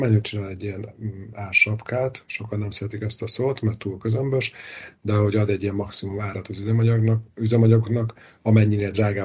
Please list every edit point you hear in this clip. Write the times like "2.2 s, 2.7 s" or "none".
none

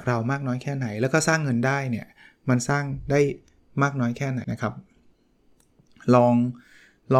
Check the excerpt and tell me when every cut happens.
4.4 s

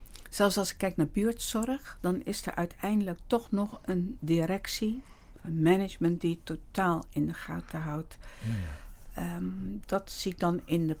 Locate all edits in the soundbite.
9.8 s

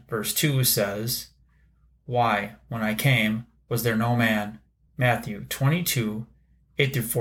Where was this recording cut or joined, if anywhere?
4.9 s

